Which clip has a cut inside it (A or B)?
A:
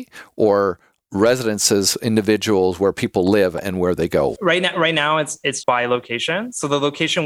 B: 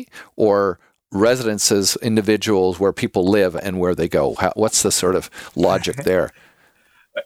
A